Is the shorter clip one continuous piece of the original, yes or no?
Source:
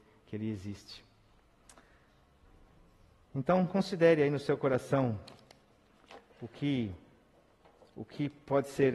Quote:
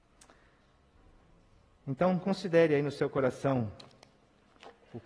yes